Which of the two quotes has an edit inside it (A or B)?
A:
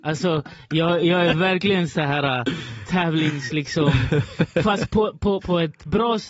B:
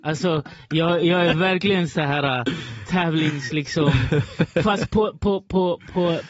A